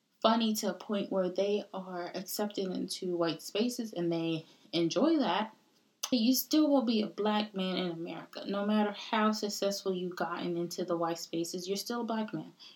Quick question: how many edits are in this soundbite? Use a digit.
1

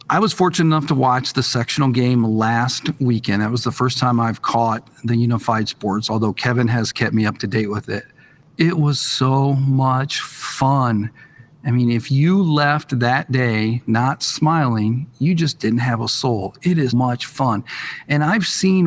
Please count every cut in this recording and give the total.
1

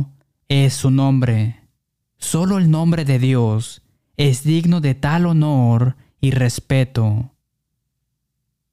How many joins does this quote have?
1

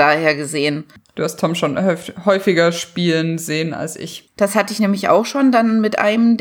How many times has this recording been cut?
2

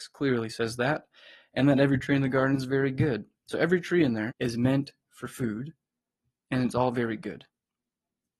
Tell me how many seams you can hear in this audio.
1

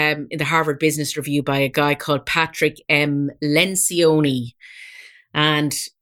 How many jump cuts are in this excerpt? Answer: 0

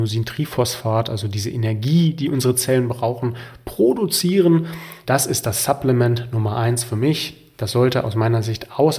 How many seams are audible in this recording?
1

